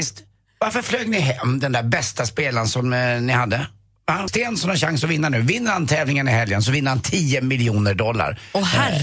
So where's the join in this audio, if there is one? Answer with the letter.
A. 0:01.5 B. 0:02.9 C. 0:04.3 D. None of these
C